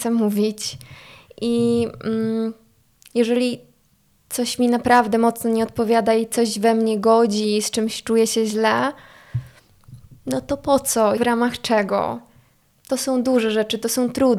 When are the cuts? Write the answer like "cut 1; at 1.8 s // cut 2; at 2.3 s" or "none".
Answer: cut 1; at 11.2 s